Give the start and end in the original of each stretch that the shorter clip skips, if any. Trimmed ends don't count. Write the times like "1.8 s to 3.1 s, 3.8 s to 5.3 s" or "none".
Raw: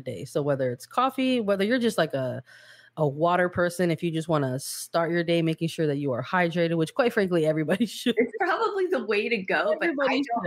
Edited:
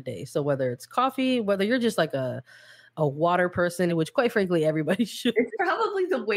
3.9 s to 6.7 s